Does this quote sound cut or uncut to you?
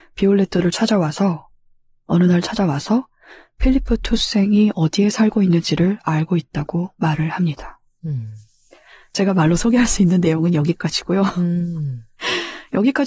uncut